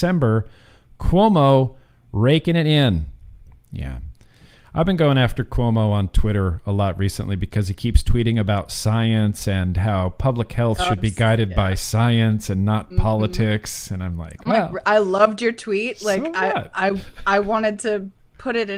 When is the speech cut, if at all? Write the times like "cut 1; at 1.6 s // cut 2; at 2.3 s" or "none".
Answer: none